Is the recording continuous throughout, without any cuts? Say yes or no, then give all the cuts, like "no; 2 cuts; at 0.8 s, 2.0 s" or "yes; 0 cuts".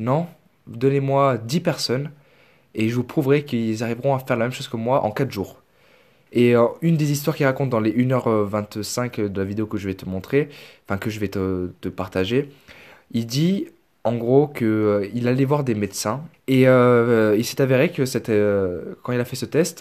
no; 2 cuts; at 6.3 s, 16.3 s